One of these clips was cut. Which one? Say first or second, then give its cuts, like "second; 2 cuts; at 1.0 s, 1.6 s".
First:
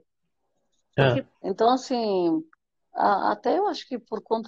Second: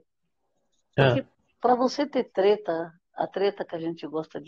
first; 1 cut; at 1.3 s